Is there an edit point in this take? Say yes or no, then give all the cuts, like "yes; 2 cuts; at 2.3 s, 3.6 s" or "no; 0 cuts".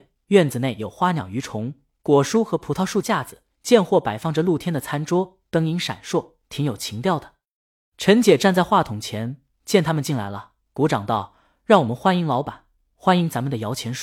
no; 0 cuts